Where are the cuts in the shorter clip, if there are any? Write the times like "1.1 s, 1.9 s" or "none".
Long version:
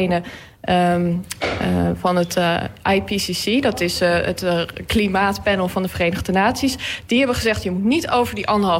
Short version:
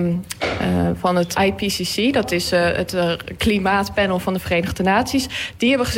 1.3 s